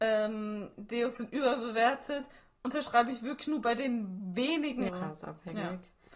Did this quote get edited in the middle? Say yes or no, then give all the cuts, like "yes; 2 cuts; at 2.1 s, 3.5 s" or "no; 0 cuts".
yes; 1 cut; at 4.9 s